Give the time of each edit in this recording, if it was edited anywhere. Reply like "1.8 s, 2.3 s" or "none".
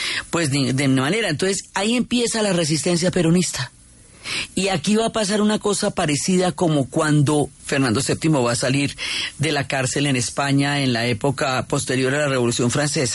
4.5 s, 7.6 s

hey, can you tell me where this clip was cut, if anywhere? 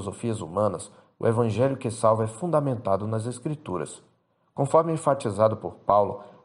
none

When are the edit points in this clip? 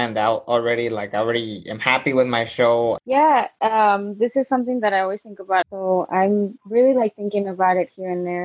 3.0 s, 5.6 s

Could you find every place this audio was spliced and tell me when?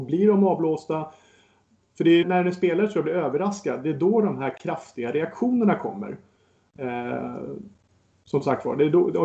2.2 s

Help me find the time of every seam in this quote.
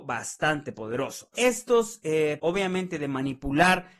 1.3 s, 2.4 s

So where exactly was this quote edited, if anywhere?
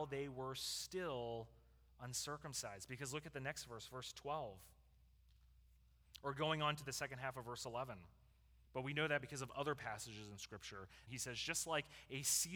8.7 s, 11.1 s

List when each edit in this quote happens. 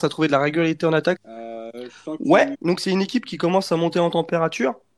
1.2 s, 2.5 s

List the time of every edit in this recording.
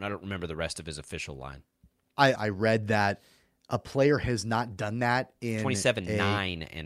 2.4 s

